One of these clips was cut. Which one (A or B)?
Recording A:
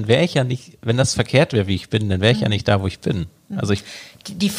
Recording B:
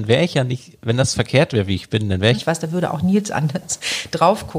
B